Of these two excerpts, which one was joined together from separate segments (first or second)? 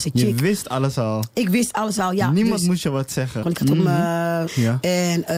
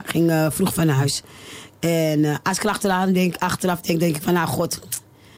first